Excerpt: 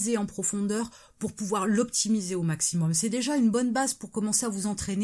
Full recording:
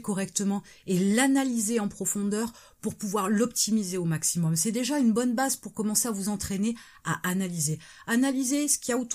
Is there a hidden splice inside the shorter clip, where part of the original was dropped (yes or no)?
no